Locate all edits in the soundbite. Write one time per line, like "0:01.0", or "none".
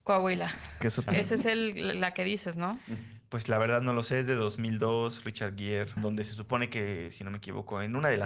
0:01.1
0:06.0